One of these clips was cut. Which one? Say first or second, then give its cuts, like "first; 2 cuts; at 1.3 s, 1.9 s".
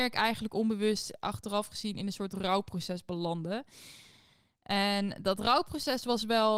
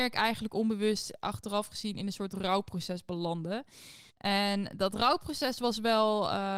second; 1 cut; at 4.1 s